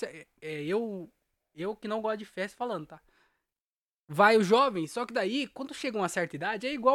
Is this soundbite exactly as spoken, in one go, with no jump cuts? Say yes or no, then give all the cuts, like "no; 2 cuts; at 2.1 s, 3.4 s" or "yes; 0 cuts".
yes; 0 cuts